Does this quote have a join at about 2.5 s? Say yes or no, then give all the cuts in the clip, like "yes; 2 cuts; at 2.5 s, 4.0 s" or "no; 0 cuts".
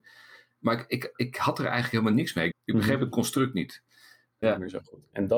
yes; 2 cuts; at 2.5 s, 4.4 s